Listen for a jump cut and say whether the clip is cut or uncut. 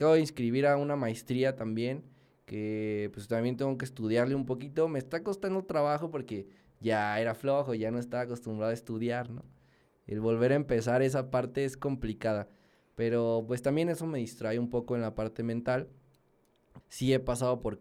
cut